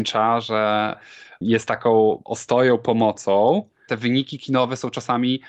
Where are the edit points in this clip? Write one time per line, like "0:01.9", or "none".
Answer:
0:03.9